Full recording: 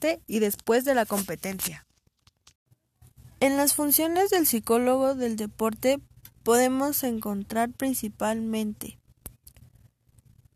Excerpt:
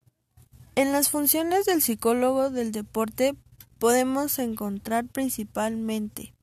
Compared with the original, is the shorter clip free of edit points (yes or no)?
yes